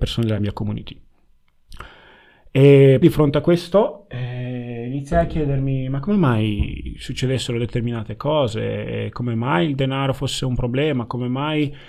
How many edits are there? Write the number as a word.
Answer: one